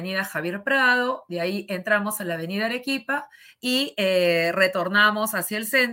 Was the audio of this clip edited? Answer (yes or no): no